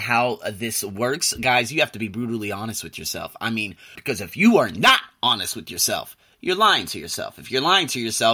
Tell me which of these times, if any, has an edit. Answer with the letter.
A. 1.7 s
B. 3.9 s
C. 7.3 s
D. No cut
B